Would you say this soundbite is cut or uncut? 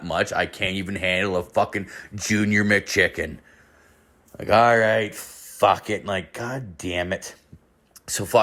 uncut